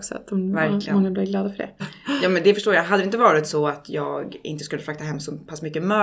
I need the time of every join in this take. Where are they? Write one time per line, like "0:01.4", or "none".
0:01.8

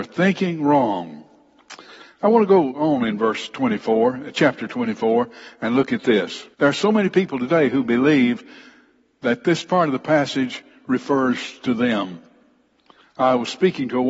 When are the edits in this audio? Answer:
0:06.5

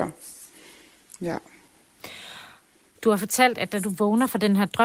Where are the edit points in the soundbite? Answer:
none

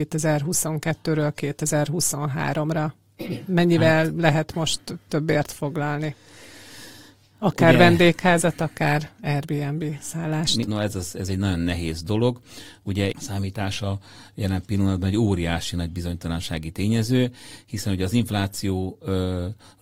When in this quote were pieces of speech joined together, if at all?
0:10.7
0:13.1

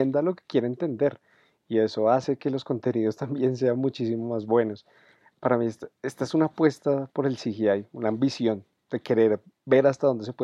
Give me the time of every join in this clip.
none

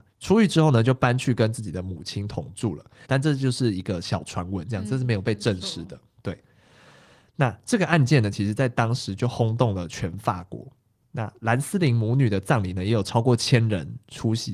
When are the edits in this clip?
0:03.0

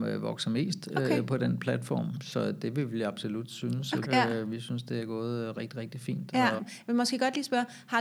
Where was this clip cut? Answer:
0:04.0
0:06.6

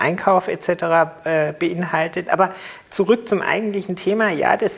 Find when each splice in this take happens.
0:02.2

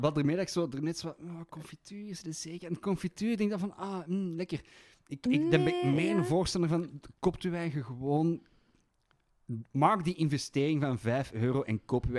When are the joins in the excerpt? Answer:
none

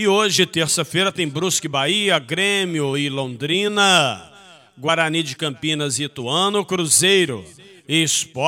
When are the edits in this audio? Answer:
none

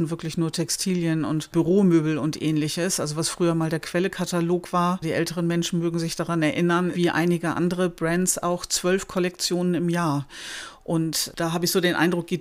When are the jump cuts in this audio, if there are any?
0:06.9

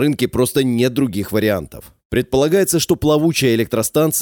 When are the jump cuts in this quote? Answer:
none

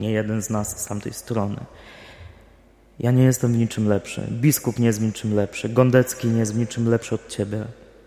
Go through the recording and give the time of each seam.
none

